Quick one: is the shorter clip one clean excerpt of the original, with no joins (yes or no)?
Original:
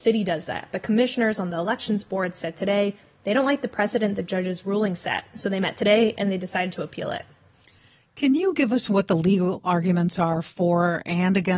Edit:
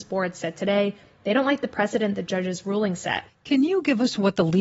no